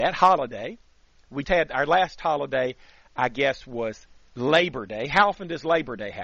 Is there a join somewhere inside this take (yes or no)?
yes